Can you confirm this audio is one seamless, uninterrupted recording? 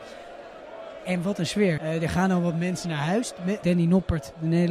no; 2 cuts; at 1.8 s, 3.6 s

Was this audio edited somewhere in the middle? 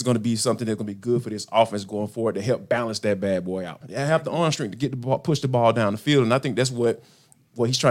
yes; 1 cut; at 3.8 s

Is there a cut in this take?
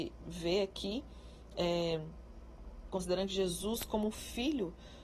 yes; 1 cut; at 2.9 s

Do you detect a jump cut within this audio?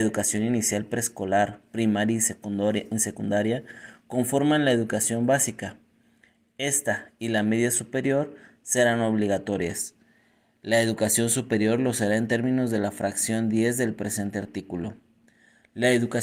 no; 0 cuts

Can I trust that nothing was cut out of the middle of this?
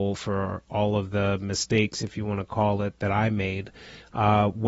yes; 0 cuts

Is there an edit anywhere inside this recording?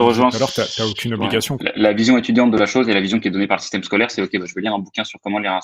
yes; 1 cut; at 1.6 s

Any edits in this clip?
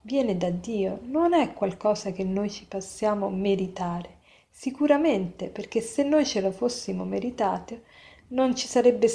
no; 0 cuts

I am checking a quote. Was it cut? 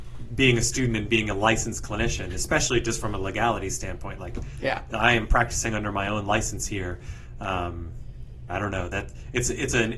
yes; 1 cut; at 8.5 s

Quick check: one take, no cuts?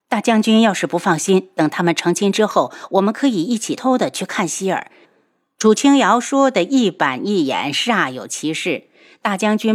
no; 2 cuts; at 3.8 s, 5.0 s

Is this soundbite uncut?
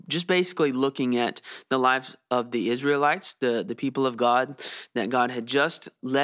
yes; 0 cuts

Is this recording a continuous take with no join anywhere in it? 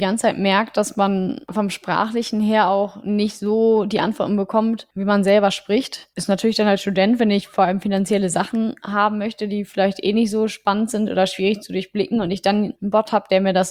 yes; 0 cuts

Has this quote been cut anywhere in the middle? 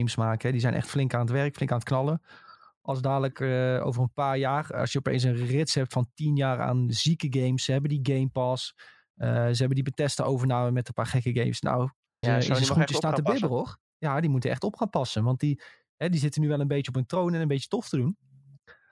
yes; 1 cut; at 12.2 s

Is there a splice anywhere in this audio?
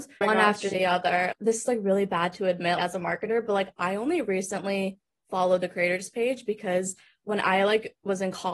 no; 0 cuts

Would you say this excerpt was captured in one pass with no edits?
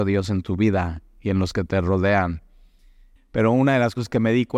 no; 1 cut; at 3.2 s

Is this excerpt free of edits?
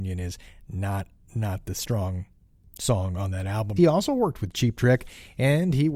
no; 1 cut; at 3.8 s

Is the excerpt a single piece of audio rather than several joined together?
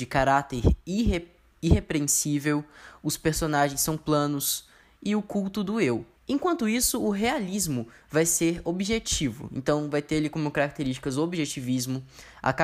no; 1 cut; at 6.1 s

